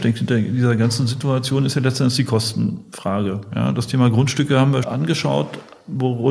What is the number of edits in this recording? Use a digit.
1